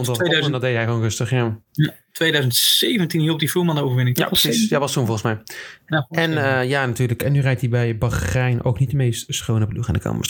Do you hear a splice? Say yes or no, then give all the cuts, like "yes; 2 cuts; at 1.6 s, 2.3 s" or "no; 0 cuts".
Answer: no; 0 cuts